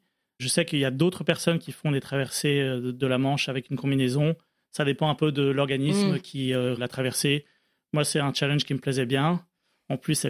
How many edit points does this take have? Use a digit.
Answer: 1